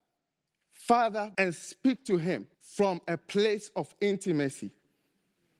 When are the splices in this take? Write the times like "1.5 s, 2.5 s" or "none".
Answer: 1.3 s, 2.5 s